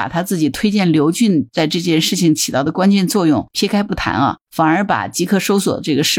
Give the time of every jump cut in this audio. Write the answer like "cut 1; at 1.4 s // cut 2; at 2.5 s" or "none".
none